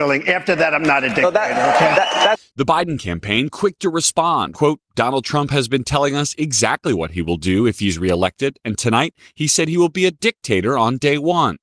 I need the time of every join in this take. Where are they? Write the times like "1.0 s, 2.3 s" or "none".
4.5 s